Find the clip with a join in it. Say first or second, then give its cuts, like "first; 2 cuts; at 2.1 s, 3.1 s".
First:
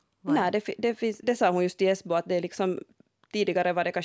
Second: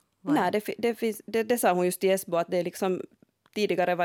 first; 1 cut; at 1.2 s